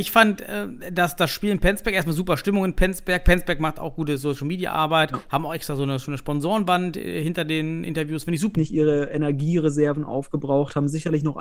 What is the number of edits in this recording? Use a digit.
1